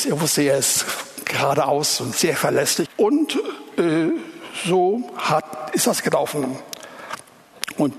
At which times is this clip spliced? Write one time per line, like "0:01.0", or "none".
0:02.9